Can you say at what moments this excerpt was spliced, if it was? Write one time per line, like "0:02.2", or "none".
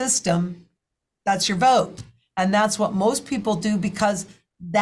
none